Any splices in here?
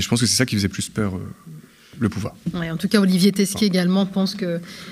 no; 0 cuts

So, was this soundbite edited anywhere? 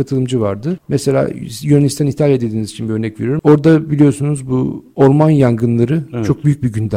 yes; 1 cut; at 3.4 s

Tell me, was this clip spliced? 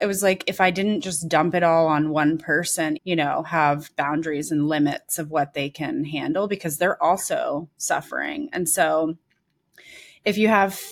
yes; 1 cut; at 3.0 s

